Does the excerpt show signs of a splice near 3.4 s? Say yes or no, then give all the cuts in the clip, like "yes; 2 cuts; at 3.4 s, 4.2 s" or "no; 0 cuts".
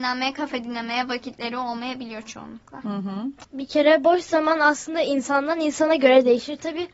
yes; 1 cut; at 3.4 s